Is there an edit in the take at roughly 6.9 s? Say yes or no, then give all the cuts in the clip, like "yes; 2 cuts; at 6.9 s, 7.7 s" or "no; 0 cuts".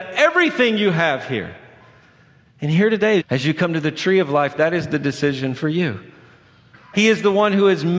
yes; 2 cuts; at 3.2 s, 6.9 s